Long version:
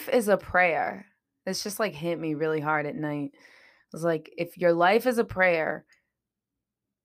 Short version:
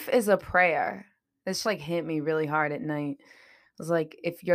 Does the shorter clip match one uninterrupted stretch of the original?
no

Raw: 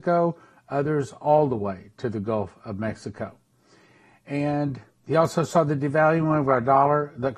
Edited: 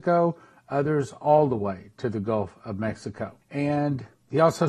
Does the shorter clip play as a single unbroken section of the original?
no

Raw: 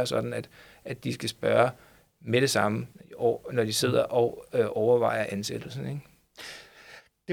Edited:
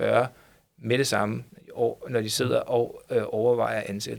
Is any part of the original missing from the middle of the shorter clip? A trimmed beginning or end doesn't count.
no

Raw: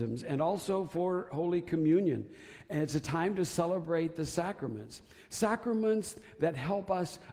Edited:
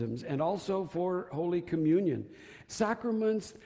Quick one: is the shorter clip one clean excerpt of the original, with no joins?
no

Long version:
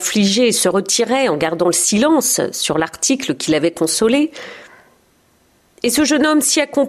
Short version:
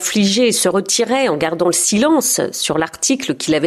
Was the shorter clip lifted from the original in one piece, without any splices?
yes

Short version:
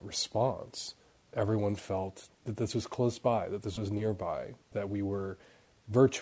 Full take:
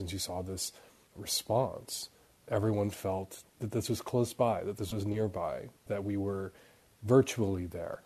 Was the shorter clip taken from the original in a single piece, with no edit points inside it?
yes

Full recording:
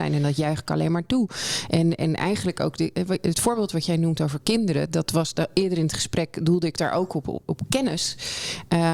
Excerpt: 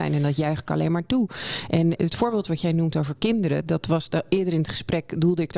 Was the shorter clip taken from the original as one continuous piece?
no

